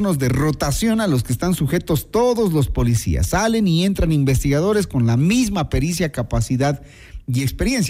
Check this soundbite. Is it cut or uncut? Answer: uncut